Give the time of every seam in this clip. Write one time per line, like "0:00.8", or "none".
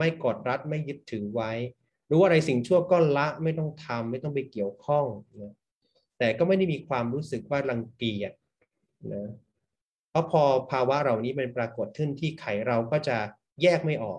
0:11.5